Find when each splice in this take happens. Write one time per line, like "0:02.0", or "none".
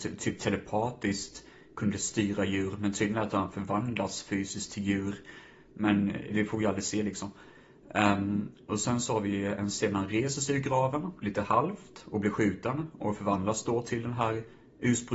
0:06.3